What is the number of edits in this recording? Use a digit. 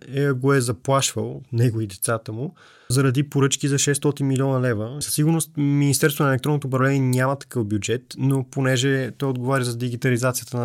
2